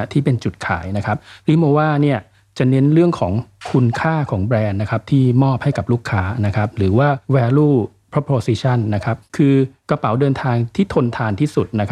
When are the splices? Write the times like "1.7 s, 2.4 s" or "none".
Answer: none